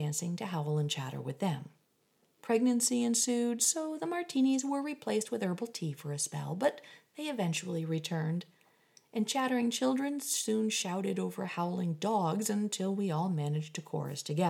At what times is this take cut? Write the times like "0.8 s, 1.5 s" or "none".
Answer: none